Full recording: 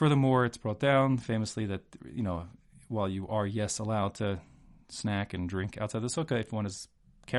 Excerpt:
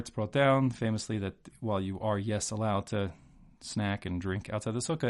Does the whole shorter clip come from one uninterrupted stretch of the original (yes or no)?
no